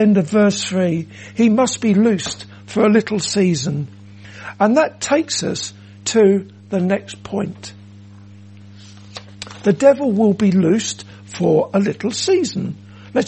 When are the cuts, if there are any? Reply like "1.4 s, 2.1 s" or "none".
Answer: none